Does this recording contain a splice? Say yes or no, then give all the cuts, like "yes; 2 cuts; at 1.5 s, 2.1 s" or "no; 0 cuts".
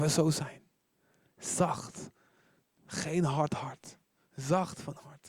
no; 0 cuts